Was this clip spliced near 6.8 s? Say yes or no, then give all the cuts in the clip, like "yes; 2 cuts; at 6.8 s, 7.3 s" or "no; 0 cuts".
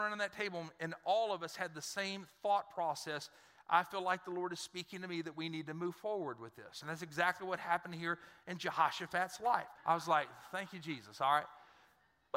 yes; 2 cuts; at 6.8 s, 9.8 s